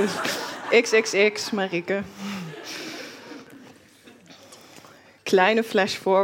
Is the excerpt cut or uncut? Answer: uncut